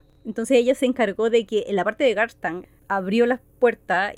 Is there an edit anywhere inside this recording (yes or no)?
yes